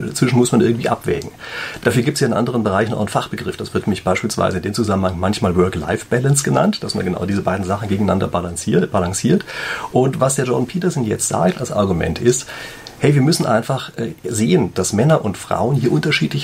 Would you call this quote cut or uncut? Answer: uncut